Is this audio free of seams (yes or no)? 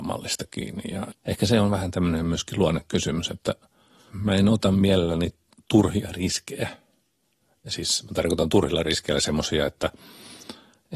no